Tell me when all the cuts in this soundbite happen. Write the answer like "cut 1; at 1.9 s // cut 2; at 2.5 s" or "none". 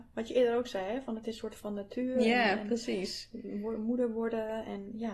none

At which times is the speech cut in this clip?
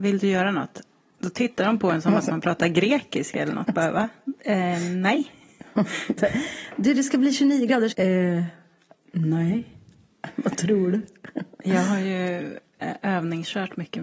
cut 1; at 7.9 s

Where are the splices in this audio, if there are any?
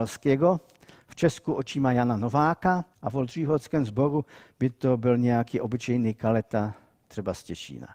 cut 1; at 2.9 s

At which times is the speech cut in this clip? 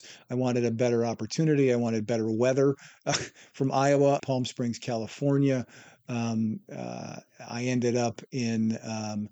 cut 1; at 4.2 s

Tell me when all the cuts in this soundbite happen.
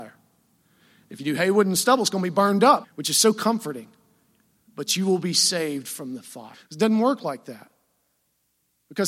cut 1; at 2.8 s // cut 2; at 6.5 s

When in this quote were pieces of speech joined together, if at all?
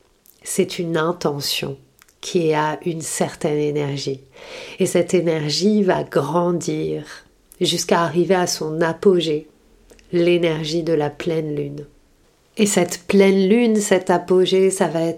none

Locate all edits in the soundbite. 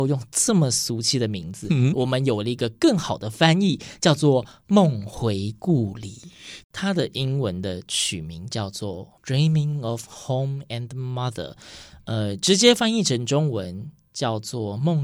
cut 1; at 1.9 s // cut 2; at 6.6 s

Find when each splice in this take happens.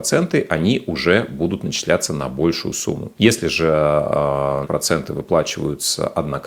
cut 1; at 3.1 s // cut 2; at 4.6 s

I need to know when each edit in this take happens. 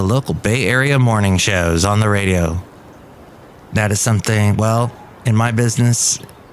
none

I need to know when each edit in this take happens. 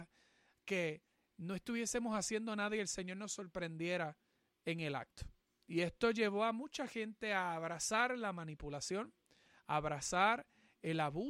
none

